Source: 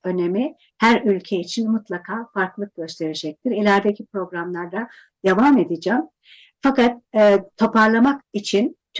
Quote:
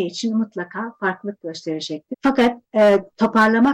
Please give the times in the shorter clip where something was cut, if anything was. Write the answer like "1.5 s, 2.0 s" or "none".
2.1 s